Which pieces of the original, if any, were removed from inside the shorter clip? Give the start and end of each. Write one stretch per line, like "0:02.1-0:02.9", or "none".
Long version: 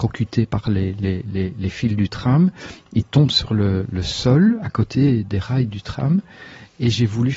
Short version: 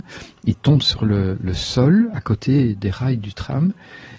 none